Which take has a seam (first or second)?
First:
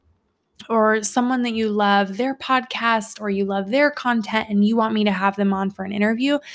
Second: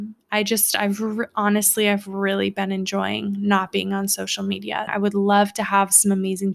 second